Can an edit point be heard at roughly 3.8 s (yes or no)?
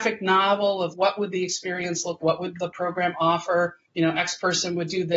yes